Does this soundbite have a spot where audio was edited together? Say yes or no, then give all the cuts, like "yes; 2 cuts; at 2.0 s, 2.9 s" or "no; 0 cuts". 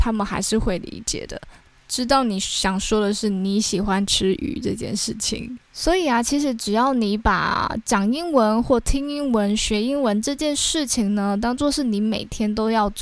no; 0 cuts